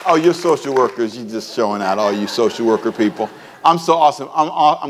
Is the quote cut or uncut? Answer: uncut